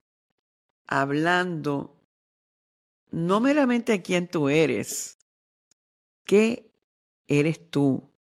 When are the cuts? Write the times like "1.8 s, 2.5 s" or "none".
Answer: none

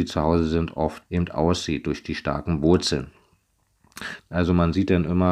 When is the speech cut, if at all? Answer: 1.0 s, 4.2 s

